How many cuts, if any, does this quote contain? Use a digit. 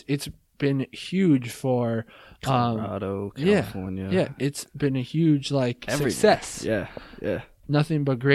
0